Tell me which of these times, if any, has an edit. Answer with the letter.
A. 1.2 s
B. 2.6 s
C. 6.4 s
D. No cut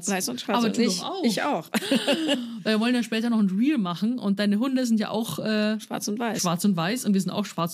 D